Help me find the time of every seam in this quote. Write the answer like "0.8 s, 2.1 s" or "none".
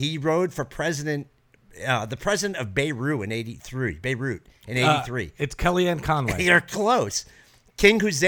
none